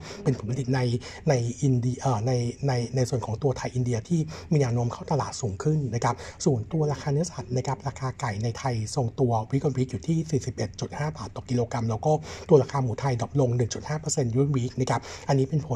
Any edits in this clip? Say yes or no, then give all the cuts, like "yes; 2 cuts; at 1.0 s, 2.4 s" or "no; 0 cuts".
no; 0 cuts